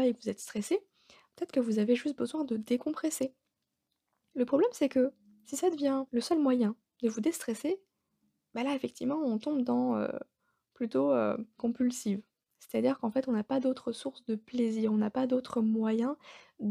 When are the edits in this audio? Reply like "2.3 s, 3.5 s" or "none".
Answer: 4.3 s, 6.1 s, 11.6 s